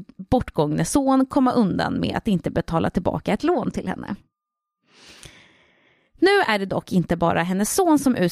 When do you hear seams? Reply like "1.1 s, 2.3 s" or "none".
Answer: none